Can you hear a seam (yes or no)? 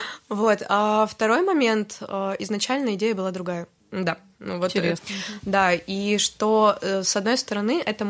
yes